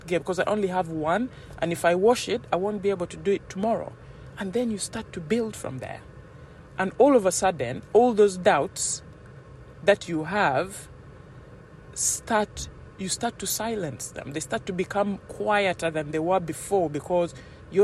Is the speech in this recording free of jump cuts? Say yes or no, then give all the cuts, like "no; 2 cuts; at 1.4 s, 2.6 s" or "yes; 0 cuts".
yes; 0 cuts